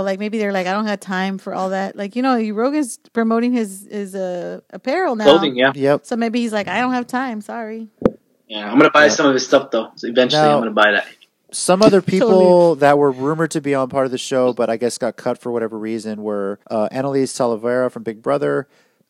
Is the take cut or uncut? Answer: cut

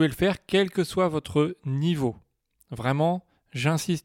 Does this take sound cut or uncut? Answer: uncut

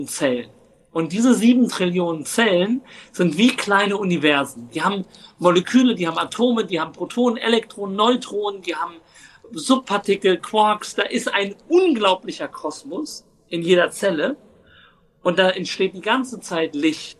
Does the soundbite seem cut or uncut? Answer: uncut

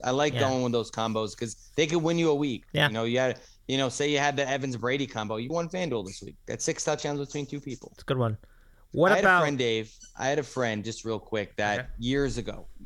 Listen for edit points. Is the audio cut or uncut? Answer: cut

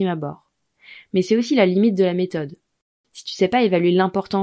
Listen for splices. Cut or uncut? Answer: uncut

